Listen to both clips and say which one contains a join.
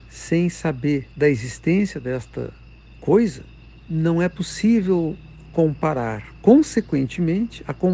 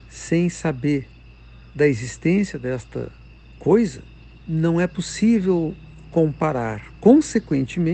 first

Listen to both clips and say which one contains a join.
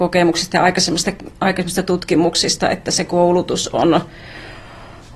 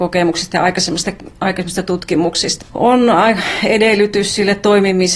second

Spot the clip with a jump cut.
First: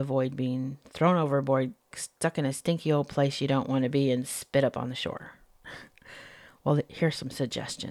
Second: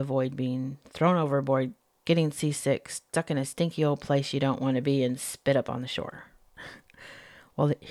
first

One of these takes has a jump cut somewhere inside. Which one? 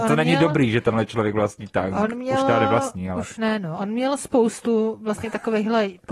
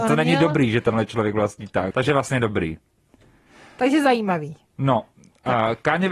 second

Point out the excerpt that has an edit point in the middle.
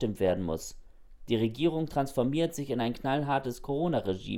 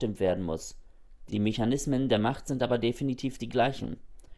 second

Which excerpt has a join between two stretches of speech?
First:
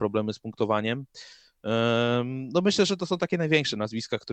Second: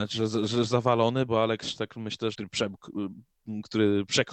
second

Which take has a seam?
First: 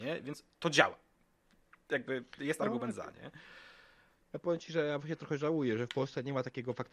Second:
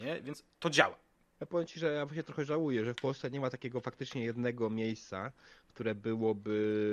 second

